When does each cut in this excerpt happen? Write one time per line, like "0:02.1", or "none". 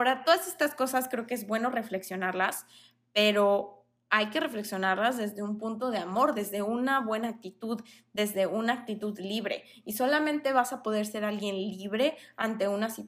none